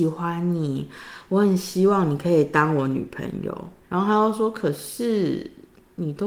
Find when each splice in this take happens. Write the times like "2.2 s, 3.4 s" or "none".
3.8 s